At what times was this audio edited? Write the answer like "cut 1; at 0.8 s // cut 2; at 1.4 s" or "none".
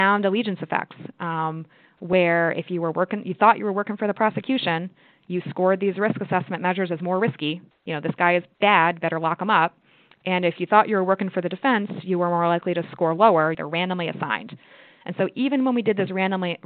cut 1; at 13.5 s